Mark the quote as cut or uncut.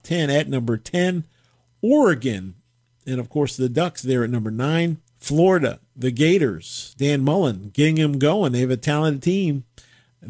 cut